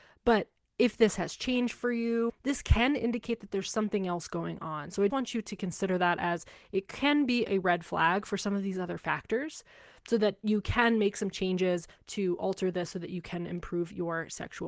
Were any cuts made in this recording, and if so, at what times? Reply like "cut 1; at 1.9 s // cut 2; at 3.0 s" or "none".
cut 1; at 2.3 s // cut 2; at 5.1 s